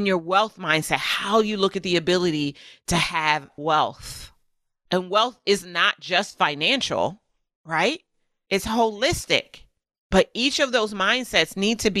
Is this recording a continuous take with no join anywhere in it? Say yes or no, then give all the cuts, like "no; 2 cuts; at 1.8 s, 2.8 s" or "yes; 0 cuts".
yes; 0 cuts